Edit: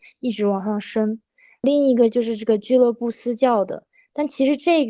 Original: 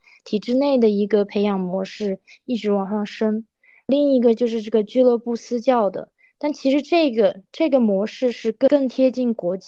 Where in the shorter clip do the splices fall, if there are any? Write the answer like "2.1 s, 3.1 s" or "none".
none